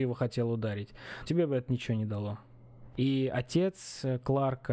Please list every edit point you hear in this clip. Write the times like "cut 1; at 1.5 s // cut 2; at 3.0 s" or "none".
cut 1; at 1.2 s // cut 2; at 2.9 s